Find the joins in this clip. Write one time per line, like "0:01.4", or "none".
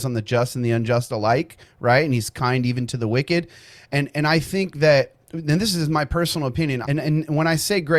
0:06.8